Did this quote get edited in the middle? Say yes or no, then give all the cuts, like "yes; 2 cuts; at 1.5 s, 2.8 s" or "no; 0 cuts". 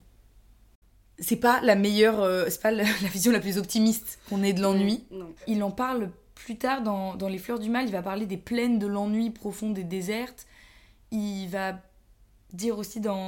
yes; 1 cut; at 5.4 s